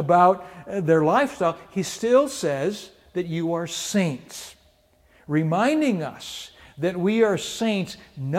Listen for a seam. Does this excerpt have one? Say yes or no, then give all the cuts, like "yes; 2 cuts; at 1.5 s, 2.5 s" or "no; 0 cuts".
no; 0 cuts